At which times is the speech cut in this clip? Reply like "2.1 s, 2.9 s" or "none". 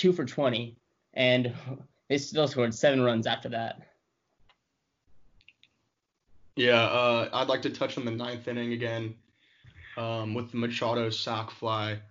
none

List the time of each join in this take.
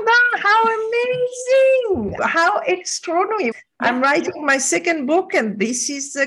2.2 s, 3.5 s

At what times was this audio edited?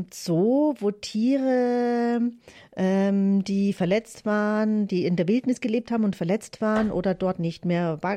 none

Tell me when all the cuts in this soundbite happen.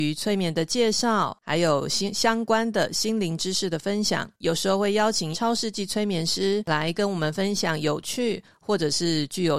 4.3 s

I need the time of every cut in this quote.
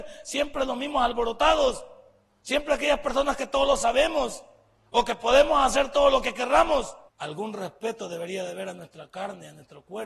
7.1 s

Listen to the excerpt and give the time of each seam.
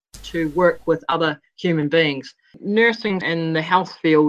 3.2 s

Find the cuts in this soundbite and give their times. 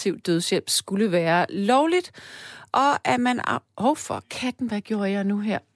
none

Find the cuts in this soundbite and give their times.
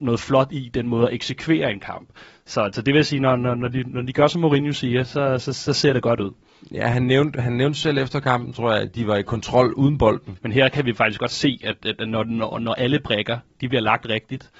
10.4 s

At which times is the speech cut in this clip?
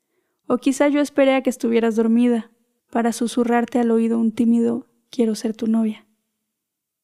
2.8 s

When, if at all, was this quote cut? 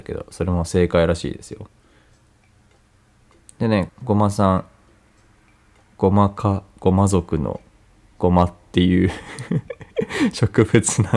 3.9 s

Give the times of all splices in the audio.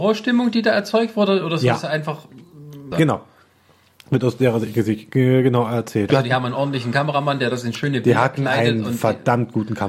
2.9 s, 6.1 s

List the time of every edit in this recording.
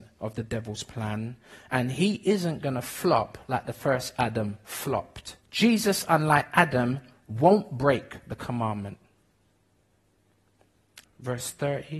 5.4 s, 11.0 s

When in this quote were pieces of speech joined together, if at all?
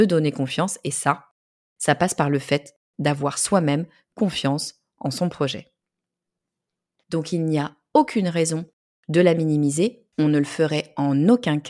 7.0 s

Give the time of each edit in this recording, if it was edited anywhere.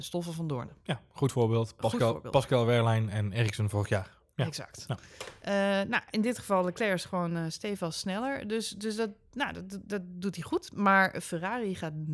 none

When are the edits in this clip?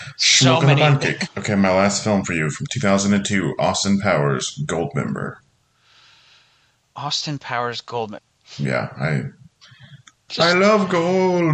1.3 s, 8.2 s, 10.3 s

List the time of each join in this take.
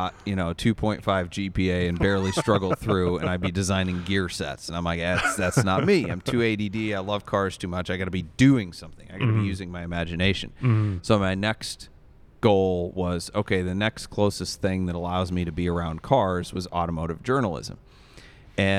none

